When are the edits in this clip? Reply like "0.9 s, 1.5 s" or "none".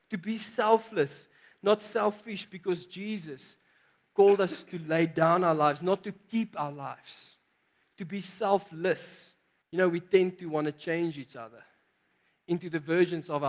9.6 s